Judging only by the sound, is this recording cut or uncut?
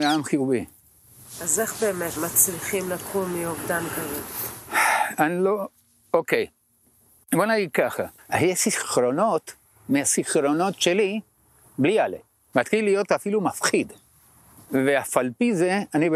cut